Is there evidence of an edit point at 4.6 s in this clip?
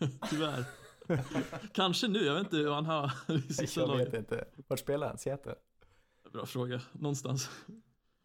no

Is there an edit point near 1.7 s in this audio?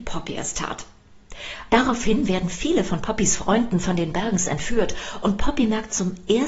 yes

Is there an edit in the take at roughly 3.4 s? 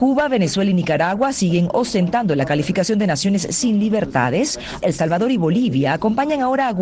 no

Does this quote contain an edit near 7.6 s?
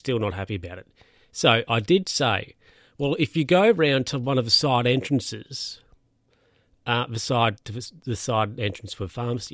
yes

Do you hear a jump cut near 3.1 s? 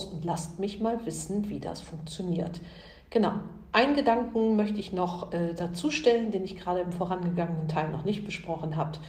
no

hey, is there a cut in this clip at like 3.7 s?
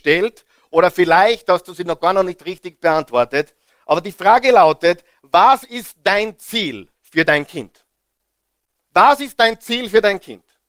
no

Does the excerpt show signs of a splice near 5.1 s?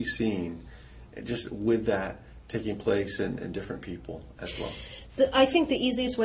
no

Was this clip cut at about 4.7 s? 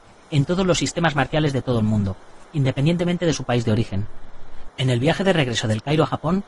yes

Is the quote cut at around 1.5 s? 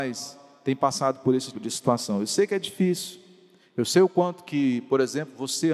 yes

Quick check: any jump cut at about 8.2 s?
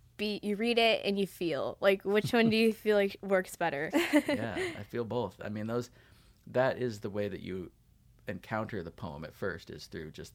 no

